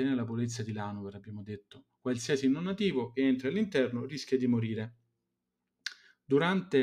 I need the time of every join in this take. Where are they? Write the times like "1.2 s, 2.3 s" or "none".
none